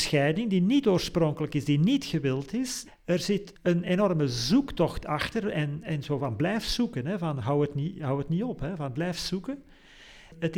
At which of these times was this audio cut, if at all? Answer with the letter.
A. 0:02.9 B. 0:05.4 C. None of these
A